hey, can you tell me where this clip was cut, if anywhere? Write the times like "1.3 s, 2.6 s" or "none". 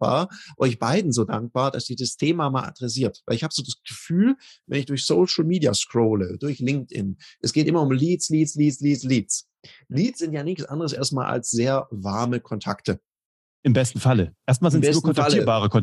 none